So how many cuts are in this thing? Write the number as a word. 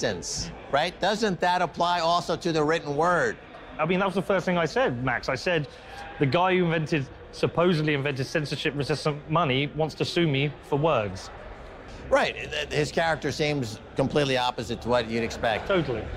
one